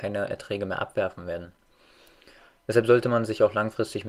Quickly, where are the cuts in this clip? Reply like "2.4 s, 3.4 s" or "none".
none